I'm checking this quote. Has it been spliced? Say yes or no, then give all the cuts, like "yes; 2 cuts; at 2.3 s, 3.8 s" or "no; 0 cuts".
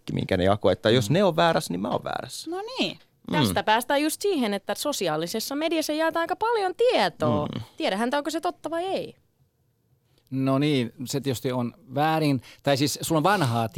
no; 0 cuts